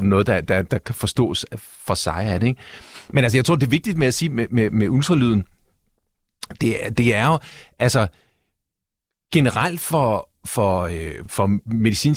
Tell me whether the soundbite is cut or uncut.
uncut